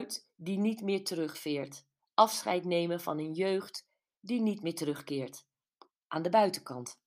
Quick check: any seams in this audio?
no; 0 cuts

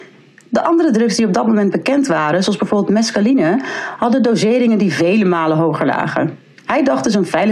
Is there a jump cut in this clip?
no; 0 cuts

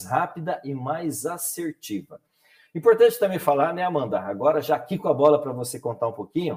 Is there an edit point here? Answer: no; 0 cuts

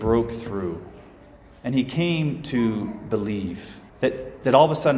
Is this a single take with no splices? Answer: no; 1 cut; at 3.9 s

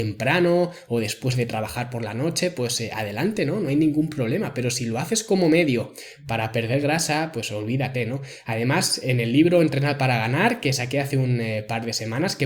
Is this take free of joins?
yes; 0 cuts

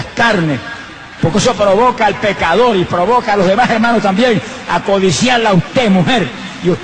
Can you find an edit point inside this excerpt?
yes; 1 cut; at 1.2 s

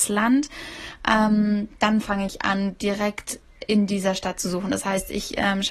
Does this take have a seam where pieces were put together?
no; 0 cuts

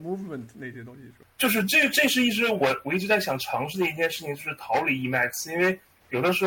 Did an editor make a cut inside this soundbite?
no; 0 cuts

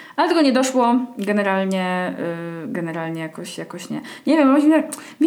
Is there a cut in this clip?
no; 0 cuts

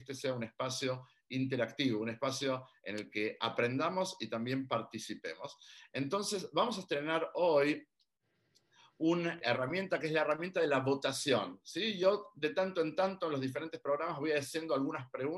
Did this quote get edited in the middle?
yes; 1 cut; at 9.4 s

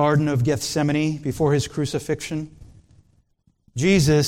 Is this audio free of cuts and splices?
yes; 0 cuts

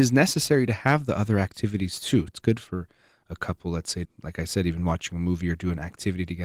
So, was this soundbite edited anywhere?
yes; 2 cuts; at 2.3 s, 4.0 s

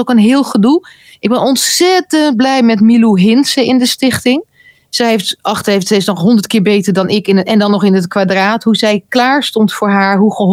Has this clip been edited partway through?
no; 0 cuts

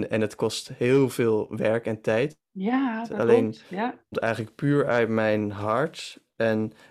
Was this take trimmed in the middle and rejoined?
no; 0 cuts

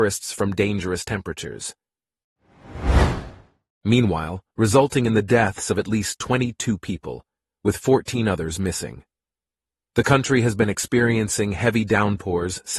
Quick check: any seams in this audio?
yes; 1 cut; at 4.5 s

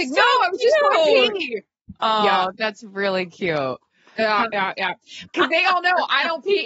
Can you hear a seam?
yes; 1 cut; at 5.3 s

